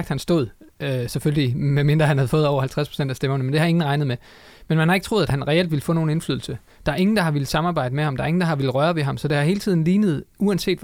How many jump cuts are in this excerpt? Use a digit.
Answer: 0